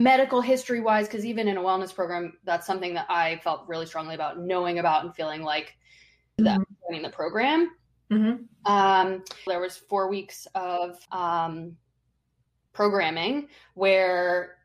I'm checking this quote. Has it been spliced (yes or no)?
yes